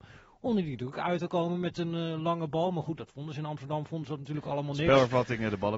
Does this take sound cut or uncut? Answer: uncut